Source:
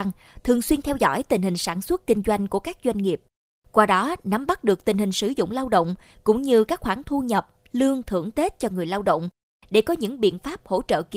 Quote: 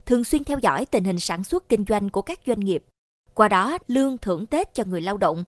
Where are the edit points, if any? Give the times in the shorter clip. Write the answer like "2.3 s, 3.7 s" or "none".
3.8 s